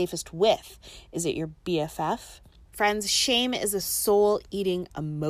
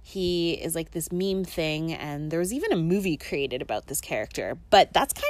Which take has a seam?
first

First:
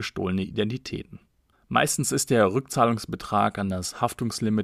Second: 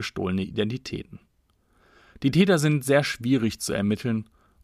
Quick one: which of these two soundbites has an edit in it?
first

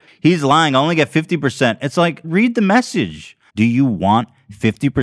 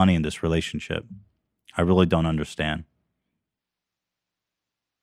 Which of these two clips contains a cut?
first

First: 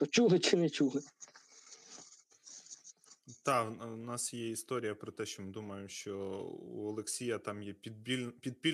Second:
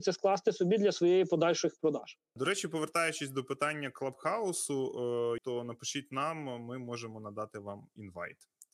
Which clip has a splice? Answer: second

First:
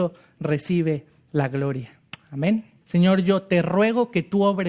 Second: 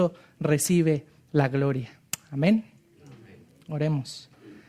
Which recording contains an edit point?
first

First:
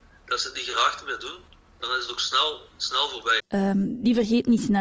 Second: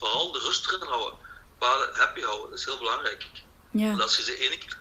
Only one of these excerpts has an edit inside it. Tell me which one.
first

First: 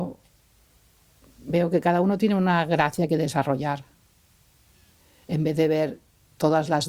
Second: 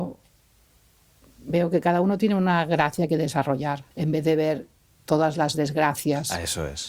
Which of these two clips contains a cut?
second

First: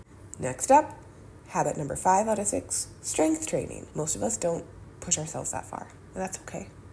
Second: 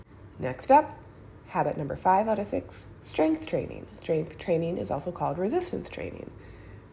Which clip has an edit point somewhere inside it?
first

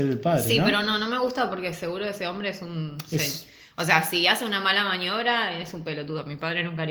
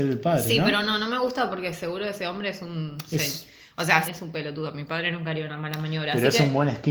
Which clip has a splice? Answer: second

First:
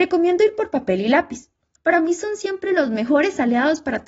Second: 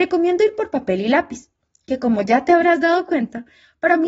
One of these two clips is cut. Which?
first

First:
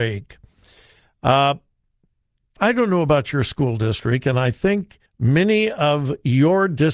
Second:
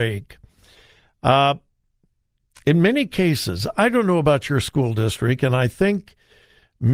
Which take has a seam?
first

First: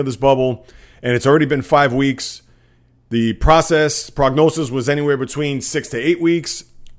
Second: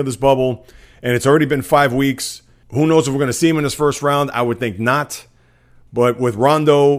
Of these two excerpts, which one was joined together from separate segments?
second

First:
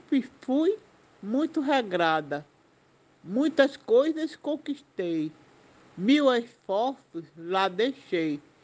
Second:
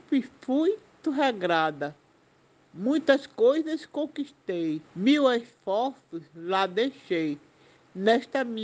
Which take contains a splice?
second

